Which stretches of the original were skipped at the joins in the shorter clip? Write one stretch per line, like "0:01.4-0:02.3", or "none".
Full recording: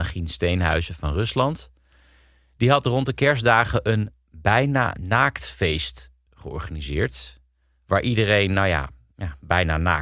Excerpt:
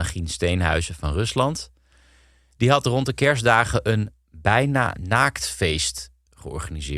none